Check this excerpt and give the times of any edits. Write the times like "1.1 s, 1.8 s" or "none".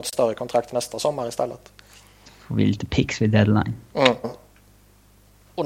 4.2 s